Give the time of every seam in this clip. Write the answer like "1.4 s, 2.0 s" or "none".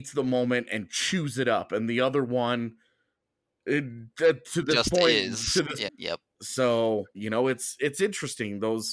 5.9 s, 7.1 s